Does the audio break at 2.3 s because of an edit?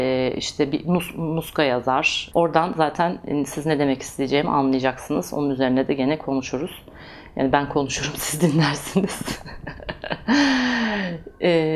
yes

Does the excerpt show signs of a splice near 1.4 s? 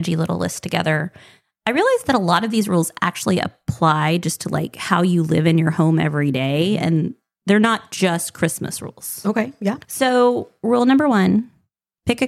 no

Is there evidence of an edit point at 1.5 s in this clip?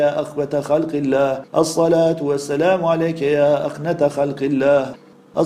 yes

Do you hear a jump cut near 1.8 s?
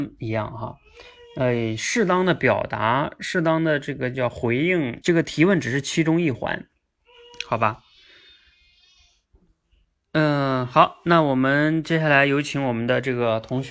no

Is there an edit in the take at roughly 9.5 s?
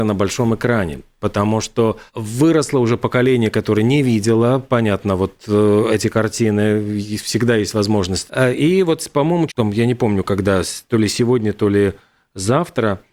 yes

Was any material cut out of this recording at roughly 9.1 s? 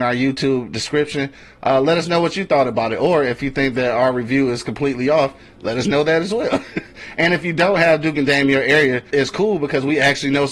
yes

